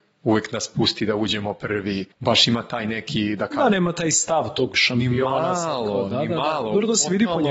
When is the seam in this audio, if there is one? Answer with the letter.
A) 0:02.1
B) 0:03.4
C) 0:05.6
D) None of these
A